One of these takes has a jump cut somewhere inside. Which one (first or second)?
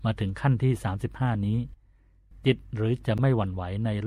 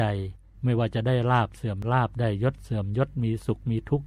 first